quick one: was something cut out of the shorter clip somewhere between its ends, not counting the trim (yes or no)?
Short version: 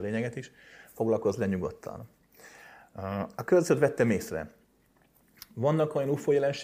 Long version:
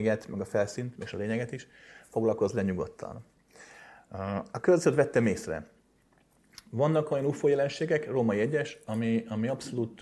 no